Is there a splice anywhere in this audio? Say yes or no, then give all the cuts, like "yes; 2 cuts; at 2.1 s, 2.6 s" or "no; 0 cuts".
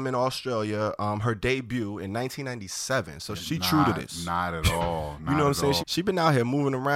yes; 2 cuts; at 3.4 s, 5.8 s